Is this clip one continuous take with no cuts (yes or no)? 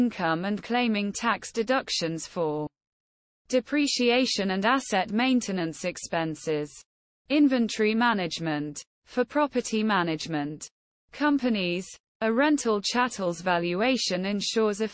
yes